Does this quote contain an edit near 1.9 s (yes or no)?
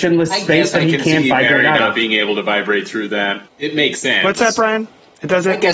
no